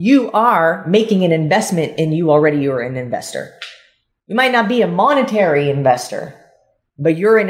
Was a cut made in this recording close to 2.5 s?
no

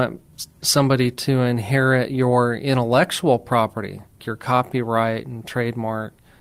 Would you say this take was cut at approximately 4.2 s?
yes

